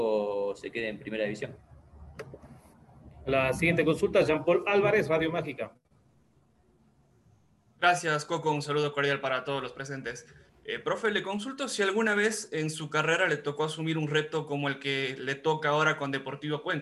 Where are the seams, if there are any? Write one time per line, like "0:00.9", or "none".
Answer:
none